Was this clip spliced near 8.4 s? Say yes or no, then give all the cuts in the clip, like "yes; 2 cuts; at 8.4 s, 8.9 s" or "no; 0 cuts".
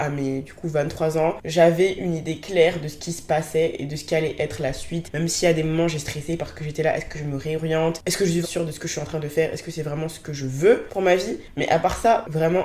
yes; 1 cut; at 8.4 s